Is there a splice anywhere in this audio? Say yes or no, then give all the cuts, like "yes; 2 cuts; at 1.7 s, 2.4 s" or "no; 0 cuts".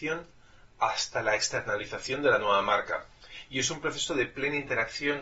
no; 0 cuts